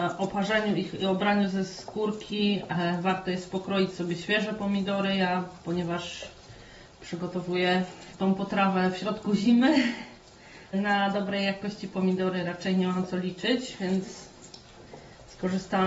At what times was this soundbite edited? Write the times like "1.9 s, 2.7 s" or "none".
10.7 s